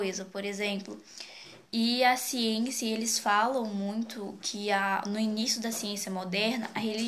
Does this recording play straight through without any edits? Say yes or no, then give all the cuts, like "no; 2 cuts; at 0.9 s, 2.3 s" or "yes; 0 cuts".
no; 1 cut; at 1.7 s